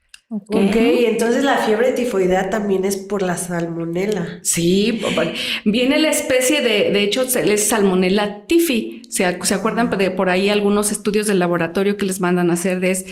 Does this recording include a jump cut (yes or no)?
no